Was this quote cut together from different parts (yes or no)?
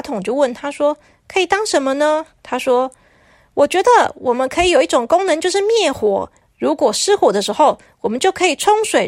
yes